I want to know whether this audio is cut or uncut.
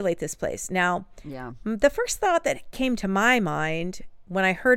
uncut